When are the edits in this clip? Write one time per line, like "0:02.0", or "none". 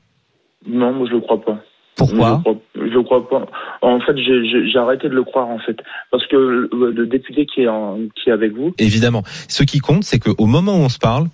0:06.9
0:08.7